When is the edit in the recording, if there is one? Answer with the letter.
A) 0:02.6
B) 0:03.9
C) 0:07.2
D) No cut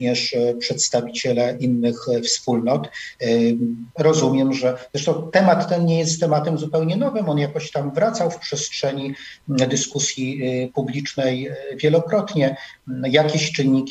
B